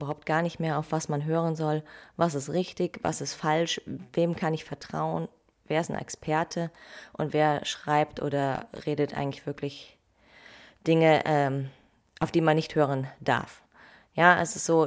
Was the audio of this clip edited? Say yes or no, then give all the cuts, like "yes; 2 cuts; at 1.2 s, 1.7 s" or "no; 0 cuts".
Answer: no; 0 cuts